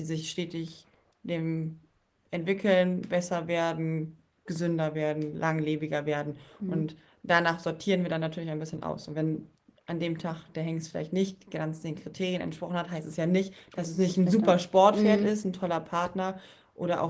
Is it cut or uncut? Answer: uncut